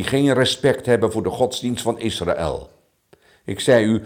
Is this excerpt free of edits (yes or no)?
yes